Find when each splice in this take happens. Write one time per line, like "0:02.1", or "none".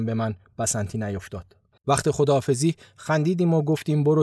0:01.8